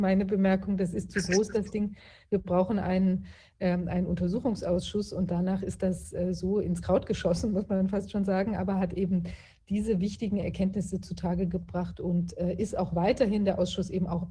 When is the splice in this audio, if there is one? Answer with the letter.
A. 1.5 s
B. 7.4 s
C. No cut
C